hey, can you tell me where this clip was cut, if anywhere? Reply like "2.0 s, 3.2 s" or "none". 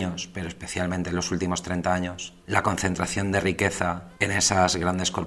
none